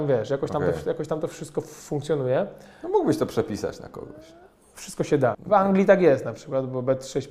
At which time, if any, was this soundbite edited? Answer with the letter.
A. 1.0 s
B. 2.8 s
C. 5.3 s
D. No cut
C